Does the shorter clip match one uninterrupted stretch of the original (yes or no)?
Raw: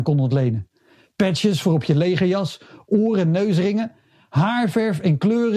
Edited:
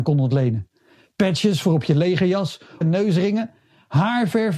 no